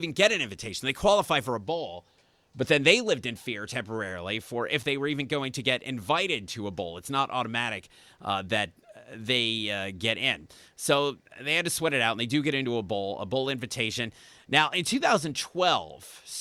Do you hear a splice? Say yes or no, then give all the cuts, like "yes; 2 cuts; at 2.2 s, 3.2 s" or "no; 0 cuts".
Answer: no; 0 cuts